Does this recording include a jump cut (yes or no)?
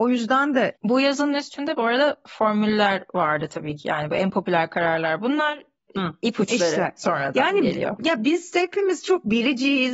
no